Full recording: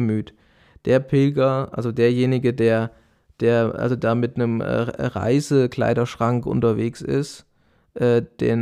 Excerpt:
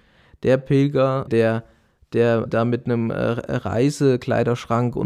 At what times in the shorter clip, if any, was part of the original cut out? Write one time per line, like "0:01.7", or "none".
0:01.3
0:02.5